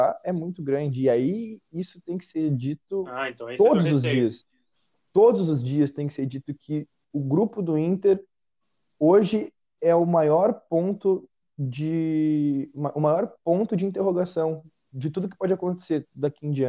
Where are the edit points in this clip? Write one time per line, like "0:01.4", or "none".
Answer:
none